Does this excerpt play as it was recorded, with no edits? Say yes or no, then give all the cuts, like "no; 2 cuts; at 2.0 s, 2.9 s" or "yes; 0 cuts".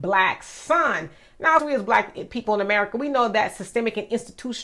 no; 1 cut; at 1.6 s